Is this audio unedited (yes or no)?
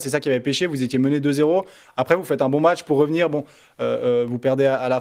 yes